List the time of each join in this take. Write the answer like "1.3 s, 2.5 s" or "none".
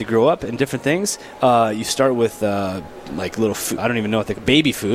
3.8 s